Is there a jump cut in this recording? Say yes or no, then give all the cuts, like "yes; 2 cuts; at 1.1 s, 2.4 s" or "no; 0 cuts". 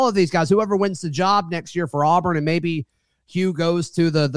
no; 0 cuts